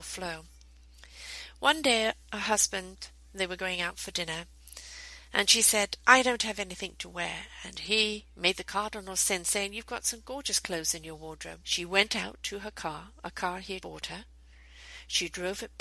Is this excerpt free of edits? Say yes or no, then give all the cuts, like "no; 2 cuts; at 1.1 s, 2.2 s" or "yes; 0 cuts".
no; 2 cuts; at 11.6 s, 13.8 s